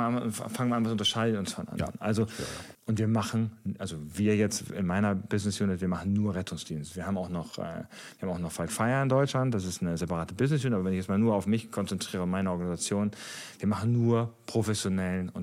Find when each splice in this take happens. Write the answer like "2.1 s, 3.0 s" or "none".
2.7 s